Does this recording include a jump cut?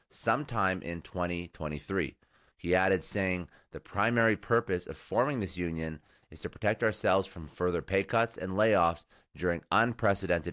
yes; 1 cut; at 2.5 s

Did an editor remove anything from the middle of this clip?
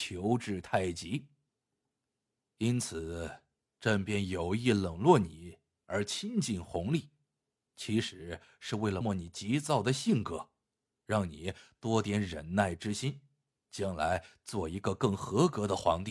yes; 1 cut; at 9.0 s

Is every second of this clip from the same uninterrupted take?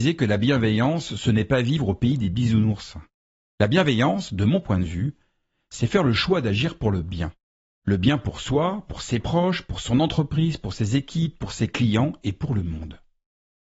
yes; 0 cuts

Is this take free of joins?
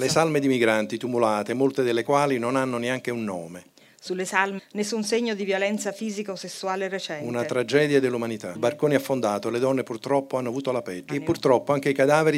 no; 3 cuts; at 4.6 s, 8.5 s, 11.1 s

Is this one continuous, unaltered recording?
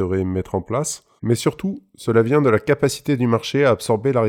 no; 1 cut; at 1.2 s

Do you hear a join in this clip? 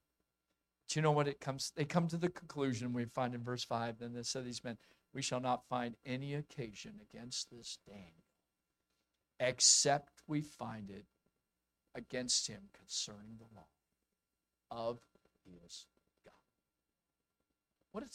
no; 0 cuts

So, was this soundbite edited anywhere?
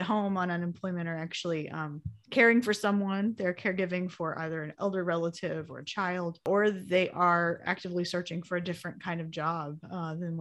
yes; 1 cut; at 2.2 s

